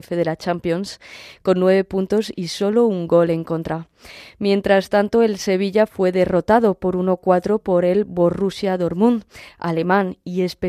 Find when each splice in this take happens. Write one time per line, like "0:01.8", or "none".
none